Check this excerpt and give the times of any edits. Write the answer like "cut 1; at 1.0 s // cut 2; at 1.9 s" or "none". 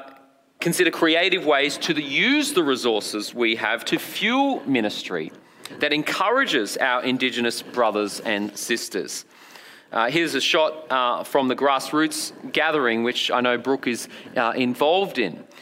none